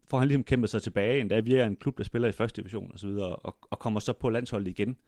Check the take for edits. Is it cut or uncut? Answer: uncut